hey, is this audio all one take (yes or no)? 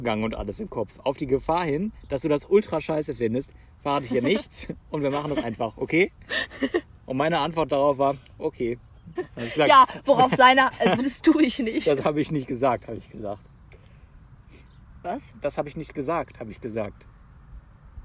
no